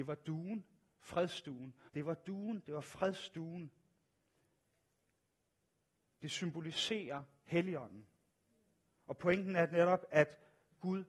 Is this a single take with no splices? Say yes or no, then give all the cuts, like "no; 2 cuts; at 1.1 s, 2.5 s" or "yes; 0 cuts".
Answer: no; 1 cut; at 1.9 s